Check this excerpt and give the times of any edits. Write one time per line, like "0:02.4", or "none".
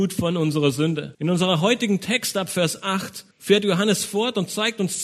0:01.1
0:03.3